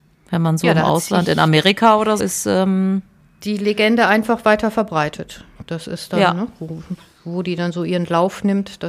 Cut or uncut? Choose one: cut